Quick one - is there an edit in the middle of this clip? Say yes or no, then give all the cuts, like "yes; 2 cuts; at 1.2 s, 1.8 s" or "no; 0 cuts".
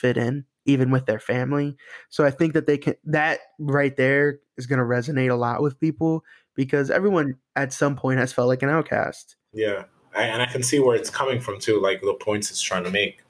no; 0 cuts